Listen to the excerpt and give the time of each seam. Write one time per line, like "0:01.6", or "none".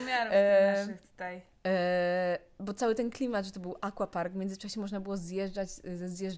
0:01.5